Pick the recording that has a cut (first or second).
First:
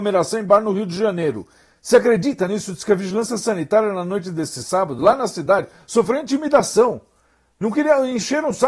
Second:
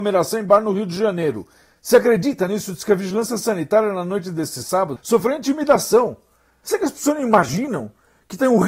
second